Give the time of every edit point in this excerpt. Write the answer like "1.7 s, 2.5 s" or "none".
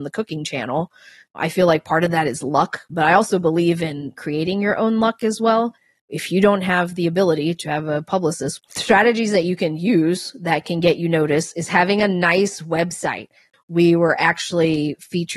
8.6 s, 13.5 s